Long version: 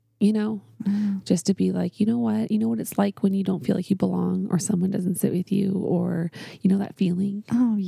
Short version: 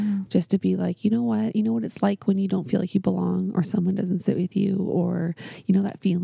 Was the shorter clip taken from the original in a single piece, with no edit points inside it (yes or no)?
yes